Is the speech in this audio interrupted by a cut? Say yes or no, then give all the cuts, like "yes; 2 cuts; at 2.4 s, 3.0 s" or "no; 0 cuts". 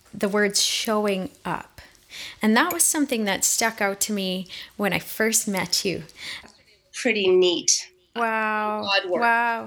yes; 2 cuts; at 6.4 s, 8.2 s